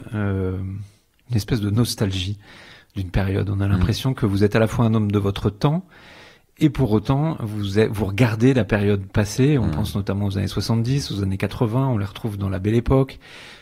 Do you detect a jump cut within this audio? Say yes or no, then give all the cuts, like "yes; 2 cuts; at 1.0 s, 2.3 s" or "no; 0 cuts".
no; 0 cuts